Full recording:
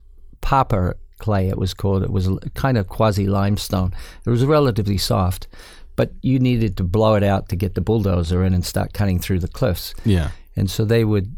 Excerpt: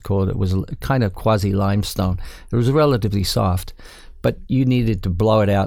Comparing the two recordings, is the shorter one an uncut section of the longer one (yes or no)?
yes